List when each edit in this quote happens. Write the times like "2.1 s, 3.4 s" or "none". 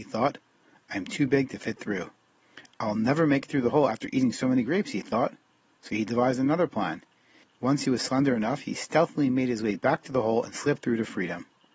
7.4 s